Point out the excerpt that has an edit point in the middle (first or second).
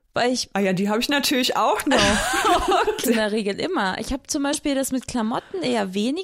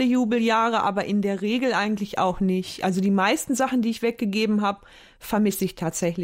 first